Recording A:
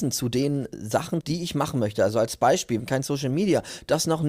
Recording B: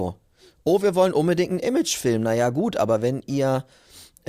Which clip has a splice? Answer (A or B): A